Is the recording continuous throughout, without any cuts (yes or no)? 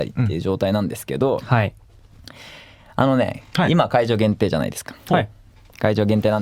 yes